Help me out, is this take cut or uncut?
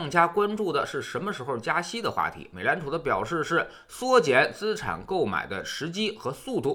uncut